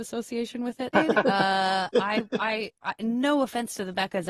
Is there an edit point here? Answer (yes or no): yes